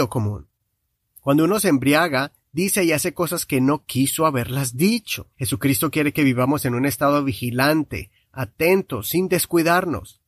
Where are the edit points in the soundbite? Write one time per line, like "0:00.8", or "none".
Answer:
0:05.3